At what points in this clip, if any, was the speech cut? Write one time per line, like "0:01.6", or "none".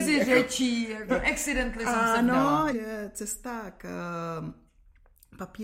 0:01.1
0:02.7